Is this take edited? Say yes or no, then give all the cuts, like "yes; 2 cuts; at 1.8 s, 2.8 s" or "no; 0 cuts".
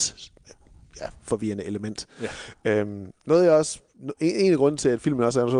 no; 0 cuts